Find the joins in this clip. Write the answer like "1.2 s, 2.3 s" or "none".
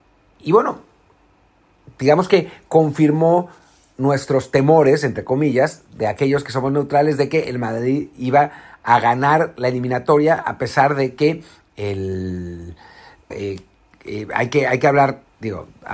13.3 s